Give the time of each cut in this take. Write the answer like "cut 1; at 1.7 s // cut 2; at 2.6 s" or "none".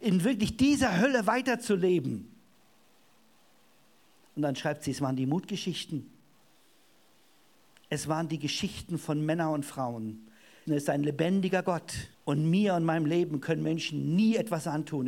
cut 1; at 10.7 s // cut 2; at 12.1 s